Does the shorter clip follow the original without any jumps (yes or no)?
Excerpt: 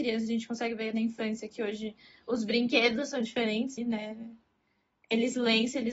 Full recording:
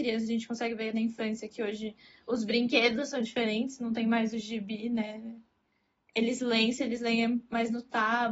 no